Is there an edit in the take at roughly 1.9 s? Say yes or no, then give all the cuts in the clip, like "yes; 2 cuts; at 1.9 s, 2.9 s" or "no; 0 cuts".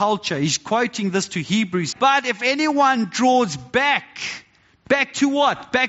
yes; 1 cut; at 1.9 s